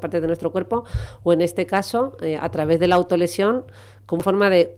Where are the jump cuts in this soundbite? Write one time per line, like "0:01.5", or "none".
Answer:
none